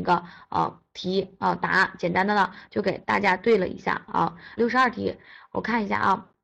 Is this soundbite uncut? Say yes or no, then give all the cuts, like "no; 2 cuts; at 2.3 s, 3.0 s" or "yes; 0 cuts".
no; 1 cut; at 4.6 s